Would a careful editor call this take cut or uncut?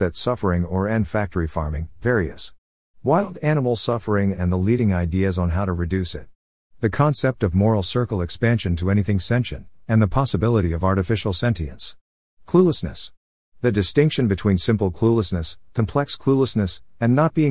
uncut